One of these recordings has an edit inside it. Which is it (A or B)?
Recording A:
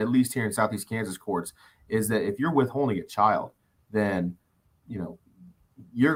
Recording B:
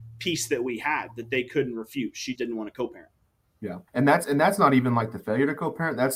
B